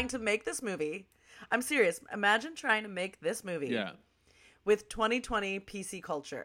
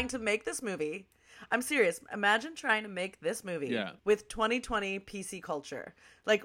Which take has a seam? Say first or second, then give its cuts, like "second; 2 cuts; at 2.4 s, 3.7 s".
second; 1 cut; at 4.0 s